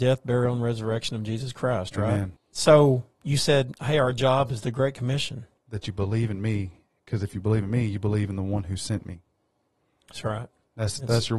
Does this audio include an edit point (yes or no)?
yes